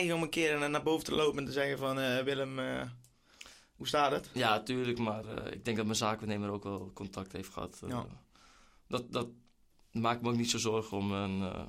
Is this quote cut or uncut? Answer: uncut